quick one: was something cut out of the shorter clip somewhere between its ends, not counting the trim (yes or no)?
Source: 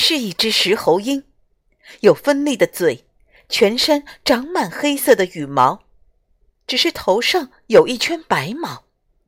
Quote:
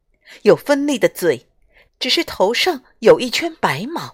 yes